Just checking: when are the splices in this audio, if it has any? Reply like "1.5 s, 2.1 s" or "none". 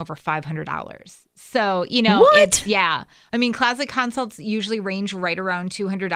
none

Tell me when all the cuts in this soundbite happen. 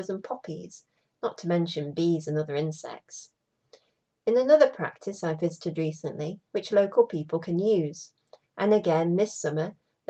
6.5 s

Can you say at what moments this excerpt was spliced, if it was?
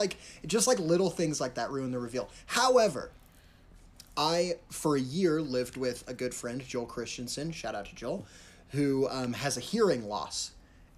none

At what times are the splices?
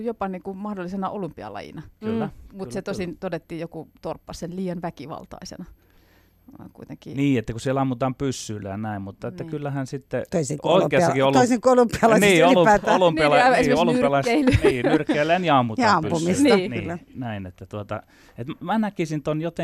17.1 s

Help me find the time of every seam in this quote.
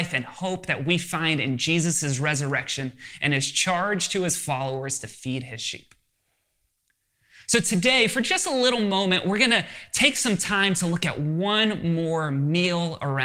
none

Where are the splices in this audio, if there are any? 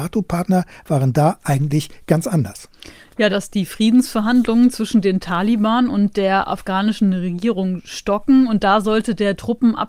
3.3 s

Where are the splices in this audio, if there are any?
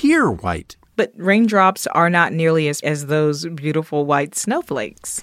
0.9 s, 2.8 s

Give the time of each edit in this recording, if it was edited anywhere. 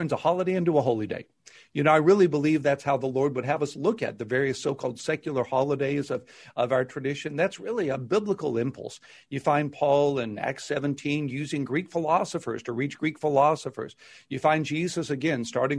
none

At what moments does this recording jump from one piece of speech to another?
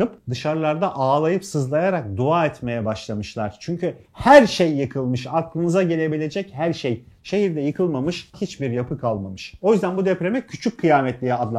8.3 s

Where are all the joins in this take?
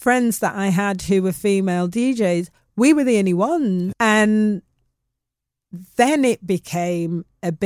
3.9 s

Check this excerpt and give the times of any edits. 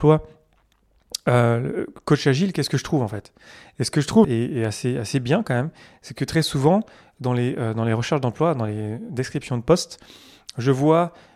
4.2 s

